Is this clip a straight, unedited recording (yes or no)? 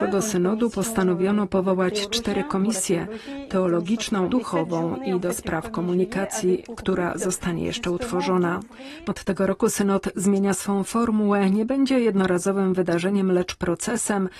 no